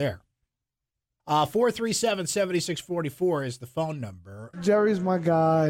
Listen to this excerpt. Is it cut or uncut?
cut